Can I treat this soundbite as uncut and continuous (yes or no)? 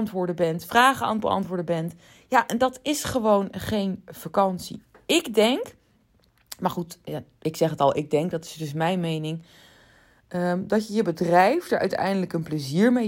yes